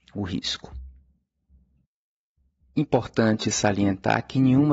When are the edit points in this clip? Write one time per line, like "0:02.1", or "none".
none